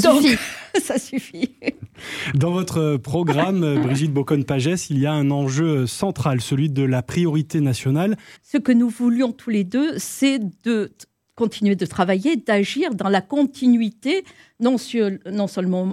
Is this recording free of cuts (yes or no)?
no